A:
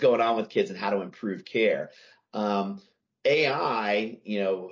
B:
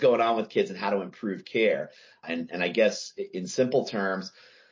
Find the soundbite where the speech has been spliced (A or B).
B